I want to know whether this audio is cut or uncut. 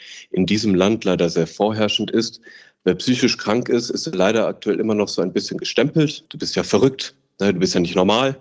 cut